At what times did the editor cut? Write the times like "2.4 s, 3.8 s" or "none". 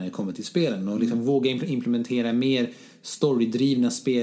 none